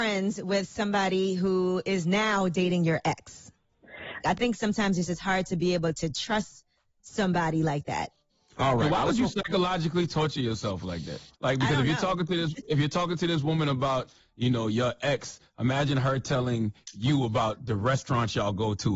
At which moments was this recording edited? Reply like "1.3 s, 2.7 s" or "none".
4.2 s, 11.3 s